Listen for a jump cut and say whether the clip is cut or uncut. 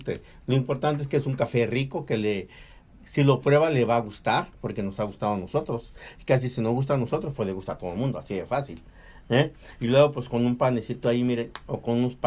uncut